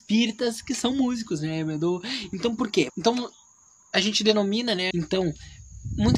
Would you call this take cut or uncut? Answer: cut